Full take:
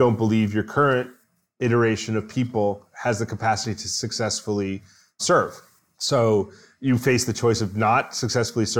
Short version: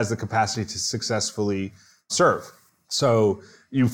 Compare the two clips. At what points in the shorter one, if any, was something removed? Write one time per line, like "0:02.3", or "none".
none